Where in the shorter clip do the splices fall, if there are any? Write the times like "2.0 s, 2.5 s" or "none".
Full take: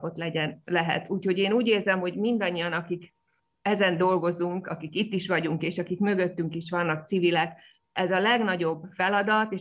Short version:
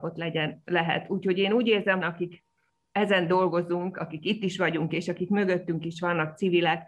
2.0 s